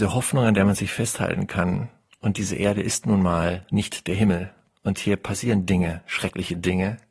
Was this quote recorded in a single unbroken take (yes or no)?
yes